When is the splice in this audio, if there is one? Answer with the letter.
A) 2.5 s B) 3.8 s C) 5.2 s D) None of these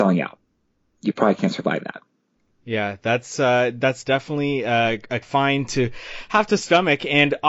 C